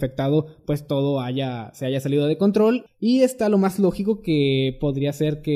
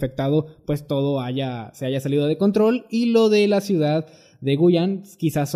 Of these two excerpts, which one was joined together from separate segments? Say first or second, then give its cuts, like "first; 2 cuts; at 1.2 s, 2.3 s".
first; 1 cut; at 2.9 s